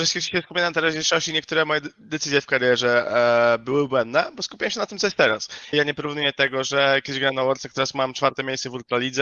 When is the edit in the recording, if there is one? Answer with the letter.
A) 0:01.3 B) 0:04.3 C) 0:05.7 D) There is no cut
C